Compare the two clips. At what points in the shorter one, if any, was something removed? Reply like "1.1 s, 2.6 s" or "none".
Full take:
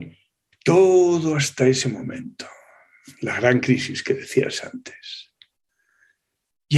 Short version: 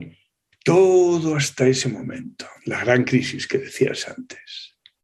2.6 s